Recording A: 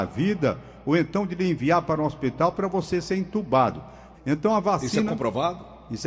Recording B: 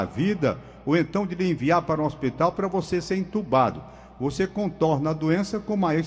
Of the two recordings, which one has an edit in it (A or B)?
A